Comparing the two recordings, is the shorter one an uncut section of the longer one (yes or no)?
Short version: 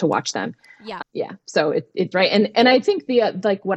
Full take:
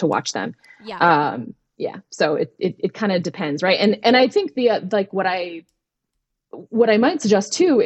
no